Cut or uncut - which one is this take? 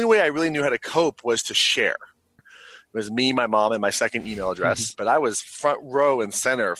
cut